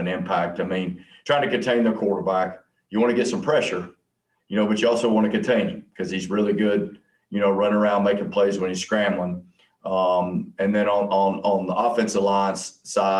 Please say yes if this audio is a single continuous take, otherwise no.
yes